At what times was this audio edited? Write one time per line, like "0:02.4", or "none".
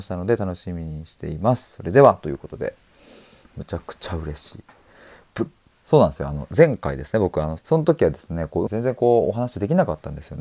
0:05.7
0:07.6
0:08.7